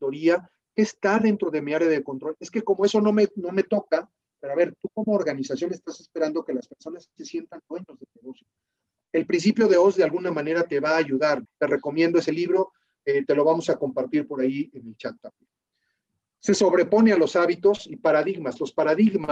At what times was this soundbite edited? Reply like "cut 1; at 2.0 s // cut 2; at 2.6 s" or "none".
cut 1; at 11.4 s